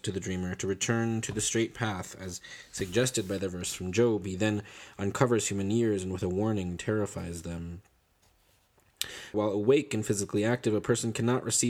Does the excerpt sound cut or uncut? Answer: cut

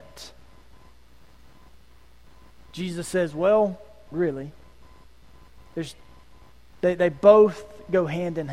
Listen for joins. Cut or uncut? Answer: cut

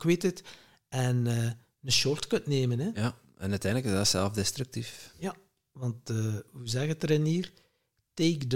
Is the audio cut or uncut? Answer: uncut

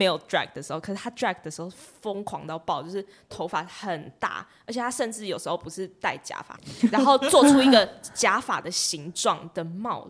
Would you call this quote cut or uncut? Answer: cut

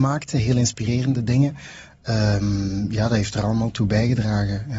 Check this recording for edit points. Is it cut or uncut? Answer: uncut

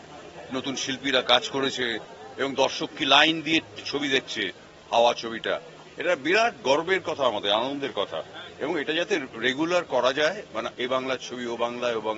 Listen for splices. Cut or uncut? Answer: uncut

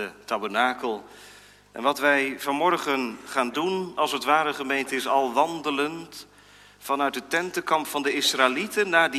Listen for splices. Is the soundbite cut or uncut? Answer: uncut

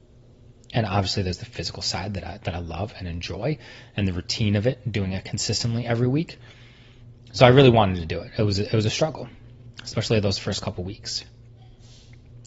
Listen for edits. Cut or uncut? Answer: uncut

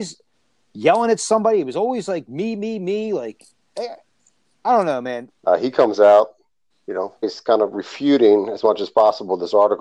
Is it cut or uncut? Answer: cut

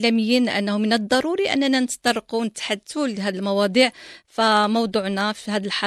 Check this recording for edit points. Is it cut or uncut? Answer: uncut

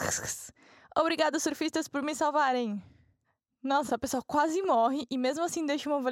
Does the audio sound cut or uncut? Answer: cut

